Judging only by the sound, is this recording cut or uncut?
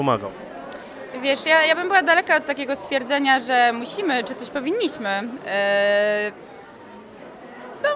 uncut